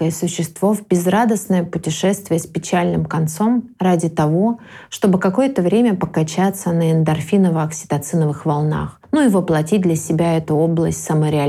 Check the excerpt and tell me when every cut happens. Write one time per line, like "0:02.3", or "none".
none